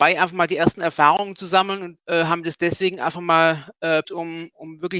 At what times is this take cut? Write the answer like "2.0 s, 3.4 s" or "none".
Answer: 2.0 s, 4.0 s